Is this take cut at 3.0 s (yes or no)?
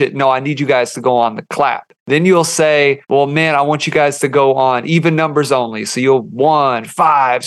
yes